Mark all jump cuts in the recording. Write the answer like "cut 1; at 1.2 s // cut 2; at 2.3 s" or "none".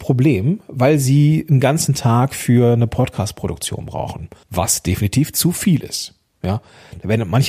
cut 1; at 4.4 s